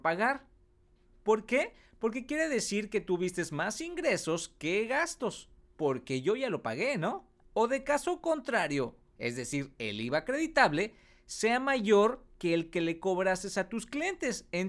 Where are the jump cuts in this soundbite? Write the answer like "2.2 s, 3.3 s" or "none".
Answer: 5.7 s, 7.5 s, 9.1 s